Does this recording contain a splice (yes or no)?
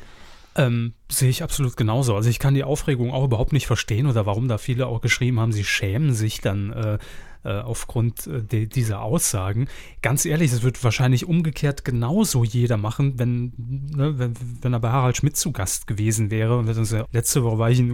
yes